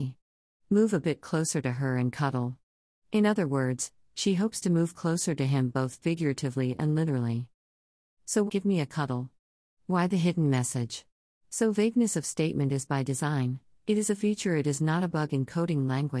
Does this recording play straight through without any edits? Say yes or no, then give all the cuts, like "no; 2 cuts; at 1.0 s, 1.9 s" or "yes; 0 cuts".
no; 2 cuts; at 8.5 s, 11.4 s